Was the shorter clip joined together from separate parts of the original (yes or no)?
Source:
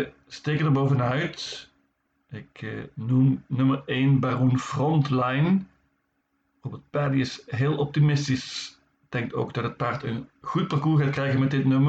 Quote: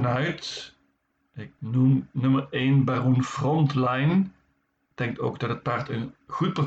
yes